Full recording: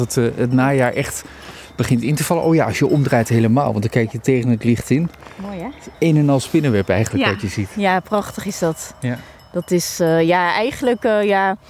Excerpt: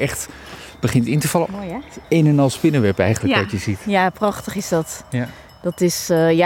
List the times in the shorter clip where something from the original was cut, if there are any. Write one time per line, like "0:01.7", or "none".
0:01.4

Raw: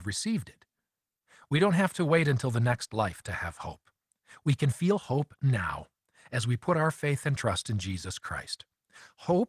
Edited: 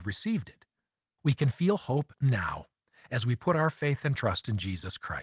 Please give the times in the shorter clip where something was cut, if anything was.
0:01.2

